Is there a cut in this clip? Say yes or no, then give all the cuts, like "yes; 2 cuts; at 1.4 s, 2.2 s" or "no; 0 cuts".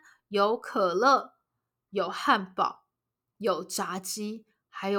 no; 0 cuts